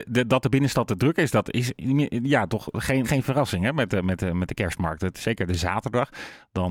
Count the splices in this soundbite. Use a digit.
1